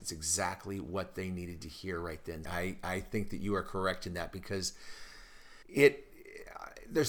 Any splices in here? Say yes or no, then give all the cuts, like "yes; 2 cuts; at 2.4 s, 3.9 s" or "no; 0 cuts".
yes; 2 cuts; at 2.4 s, 5.6 s